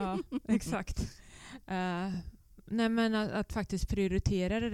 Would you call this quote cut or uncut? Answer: uncut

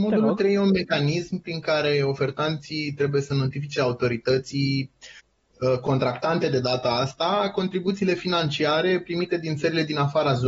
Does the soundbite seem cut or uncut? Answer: uncut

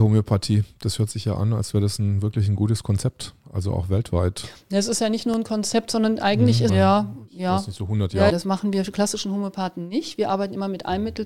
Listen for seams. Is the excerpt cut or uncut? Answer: cut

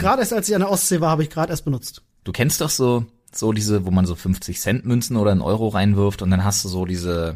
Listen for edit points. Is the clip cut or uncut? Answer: cut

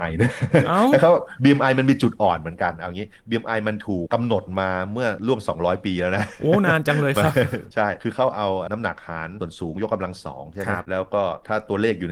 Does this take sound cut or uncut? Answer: cut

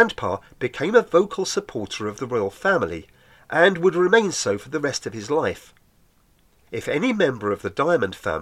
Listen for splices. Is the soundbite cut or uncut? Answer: cut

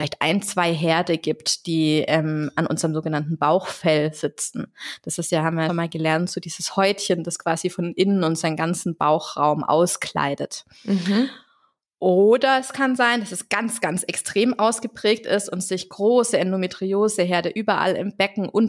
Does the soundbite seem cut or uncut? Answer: cut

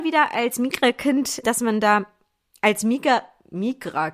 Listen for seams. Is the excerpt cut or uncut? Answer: cut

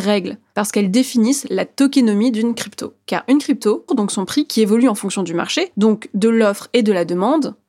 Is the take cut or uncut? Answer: cut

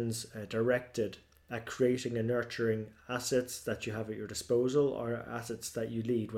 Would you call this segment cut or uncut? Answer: uncut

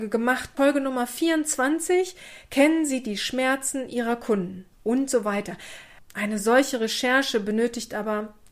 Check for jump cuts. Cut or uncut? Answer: cut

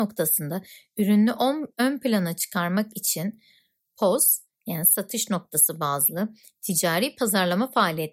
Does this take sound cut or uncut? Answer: uncut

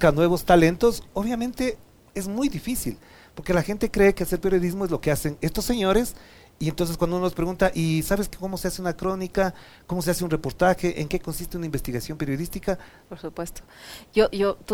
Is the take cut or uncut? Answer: cut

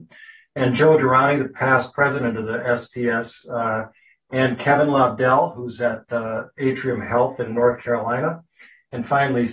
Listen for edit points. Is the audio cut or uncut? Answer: uncut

